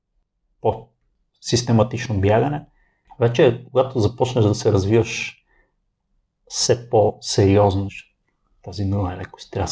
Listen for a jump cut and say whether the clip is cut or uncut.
cut